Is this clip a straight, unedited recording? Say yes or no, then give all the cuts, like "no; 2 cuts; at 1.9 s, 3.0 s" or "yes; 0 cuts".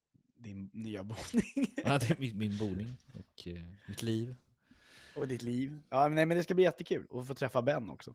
yes; 0 cuts